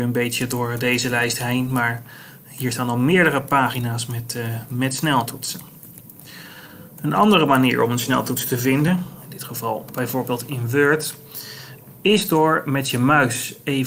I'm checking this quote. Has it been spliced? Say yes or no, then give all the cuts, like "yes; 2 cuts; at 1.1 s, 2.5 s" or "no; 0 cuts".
no; 0 cuts